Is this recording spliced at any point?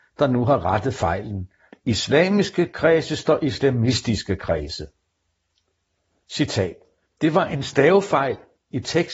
yes; 2 cuts; at 1.7 s, 6.2 s

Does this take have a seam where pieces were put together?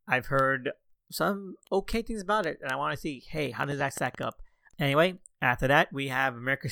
yes; 1 cut; at 4.7 s

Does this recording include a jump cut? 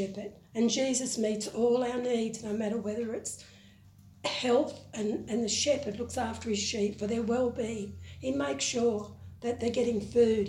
no; 0 cuts

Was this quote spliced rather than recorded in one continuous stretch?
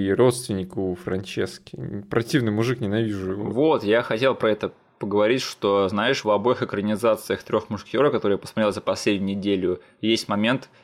yes; 1 cut; at 6.2 s

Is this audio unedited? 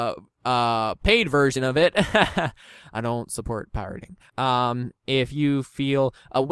no; 1 cut; at 4.3 s

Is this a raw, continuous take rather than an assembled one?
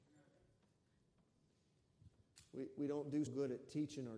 no; 1 cut; at 3.3 s

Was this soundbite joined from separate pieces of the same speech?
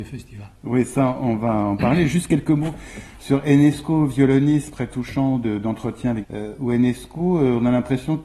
yes; 2 cuts; at 4.7 s, 6.2 s

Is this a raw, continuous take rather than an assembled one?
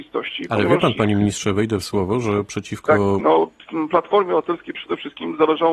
no; 1 cut; at 3.2 s

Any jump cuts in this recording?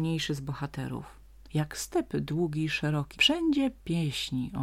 yes; 1 cut; at 3.1 s

